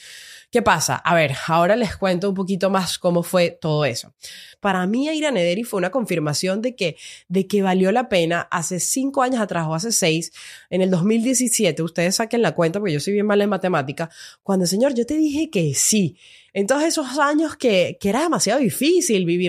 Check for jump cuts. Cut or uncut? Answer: cut